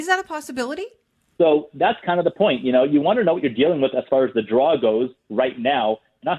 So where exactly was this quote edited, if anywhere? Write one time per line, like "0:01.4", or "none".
0:01.4